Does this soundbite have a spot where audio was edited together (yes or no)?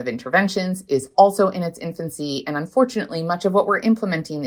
no